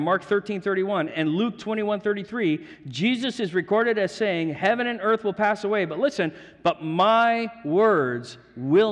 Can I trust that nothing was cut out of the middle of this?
yes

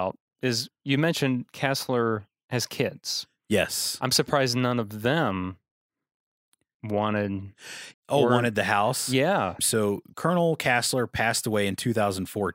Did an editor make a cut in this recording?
yes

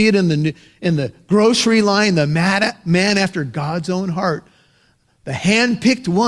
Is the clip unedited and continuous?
no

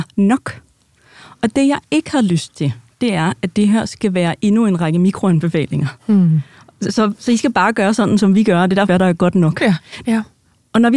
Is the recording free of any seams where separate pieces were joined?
no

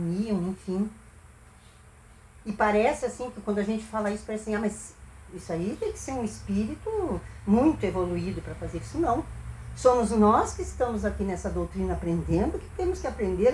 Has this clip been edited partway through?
no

